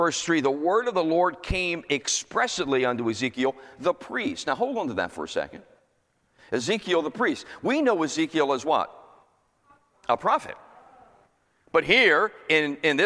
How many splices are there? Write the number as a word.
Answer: zero